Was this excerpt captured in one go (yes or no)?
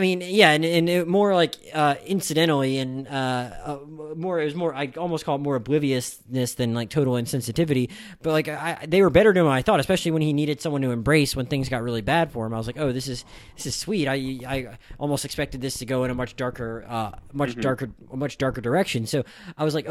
yes